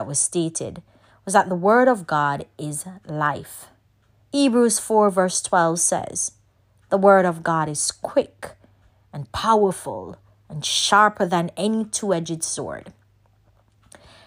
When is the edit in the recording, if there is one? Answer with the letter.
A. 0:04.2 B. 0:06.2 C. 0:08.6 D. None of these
A